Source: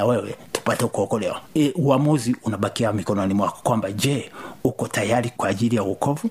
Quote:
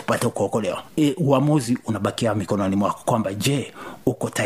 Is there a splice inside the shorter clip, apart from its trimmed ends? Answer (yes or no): no